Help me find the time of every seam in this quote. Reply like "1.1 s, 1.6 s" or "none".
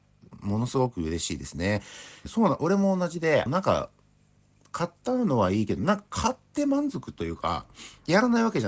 2.3 s, 3.5 s